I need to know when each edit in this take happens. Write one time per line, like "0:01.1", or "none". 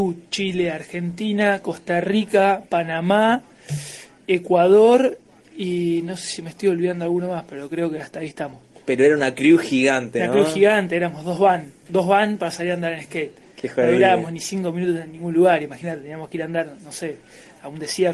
none